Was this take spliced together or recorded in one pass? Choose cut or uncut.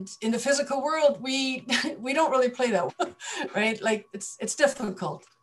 cut